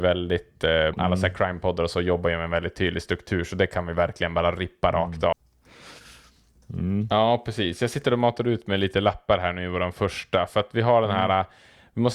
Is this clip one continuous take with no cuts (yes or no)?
no